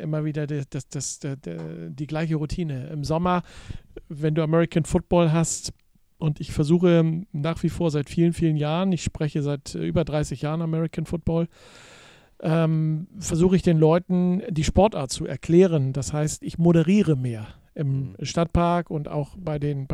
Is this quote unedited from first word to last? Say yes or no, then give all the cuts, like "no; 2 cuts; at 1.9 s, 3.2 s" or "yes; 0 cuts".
yes; 0 cuts